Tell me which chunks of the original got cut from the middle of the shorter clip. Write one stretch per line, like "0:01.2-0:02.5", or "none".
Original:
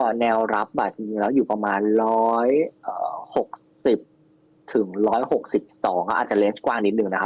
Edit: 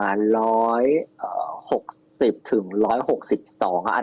0:04.1-0:04.6